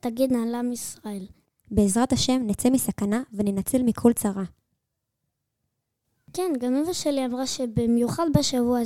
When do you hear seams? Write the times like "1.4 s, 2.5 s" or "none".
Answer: 1.6 s